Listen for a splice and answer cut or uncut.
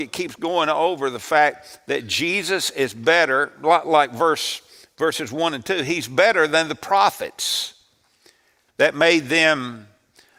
cut